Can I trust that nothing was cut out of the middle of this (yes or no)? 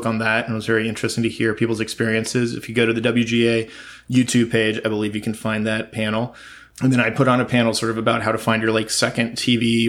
yes